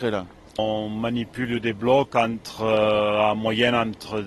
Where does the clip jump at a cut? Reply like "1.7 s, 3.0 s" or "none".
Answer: none